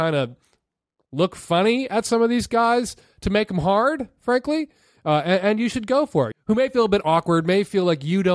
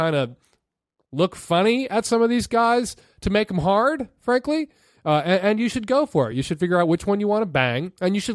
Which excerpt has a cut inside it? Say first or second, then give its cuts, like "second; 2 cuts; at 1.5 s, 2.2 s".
first; 1 cut; at 6.3 s